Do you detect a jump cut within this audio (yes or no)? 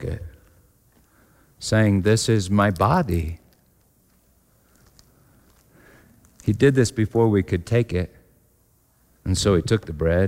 yes